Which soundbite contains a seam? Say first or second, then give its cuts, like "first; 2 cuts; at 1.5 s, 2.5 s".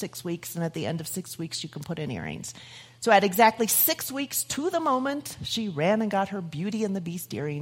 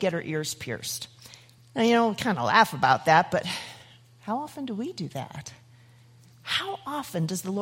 second; 1 cut; at 1.6 s